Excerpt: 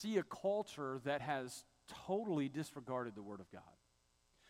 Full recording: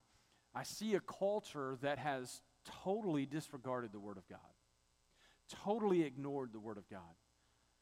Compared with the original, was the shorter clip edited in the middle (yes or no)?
no